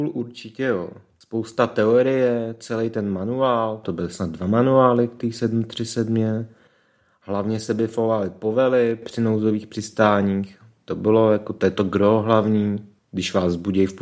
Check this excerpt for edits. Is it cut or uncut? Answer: uncut